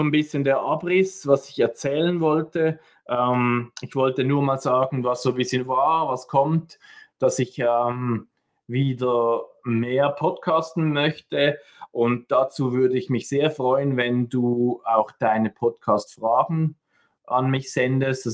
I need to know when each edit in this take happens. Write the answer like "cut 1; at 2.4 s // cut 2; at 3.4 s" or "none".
none